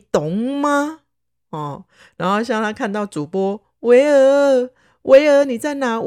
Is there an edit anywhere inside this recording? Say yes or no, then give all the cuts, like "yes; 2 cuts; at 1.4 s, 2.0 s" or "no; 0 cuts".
yes; 1 cut; at 1.4 s